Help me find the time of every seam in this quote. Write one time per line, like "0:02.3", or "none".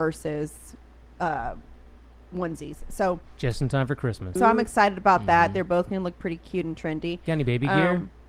0:04.4